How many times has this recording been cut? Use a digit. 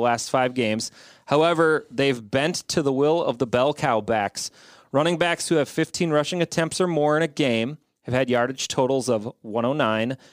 0